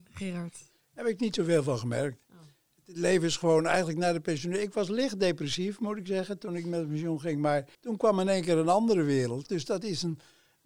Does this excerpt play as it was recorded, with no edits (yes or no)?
no